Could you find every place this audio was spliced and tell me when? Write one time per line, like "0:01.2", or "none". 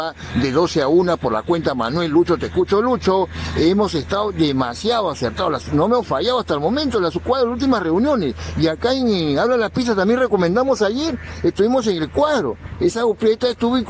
none